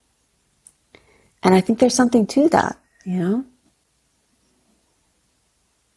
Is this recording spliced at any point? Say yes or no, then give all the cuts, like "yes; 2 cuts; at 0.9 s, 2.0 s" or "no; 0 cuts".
no; 0 cuts